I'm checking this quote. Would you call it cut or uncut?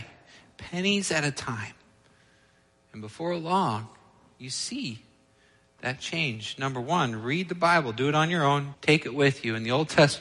cut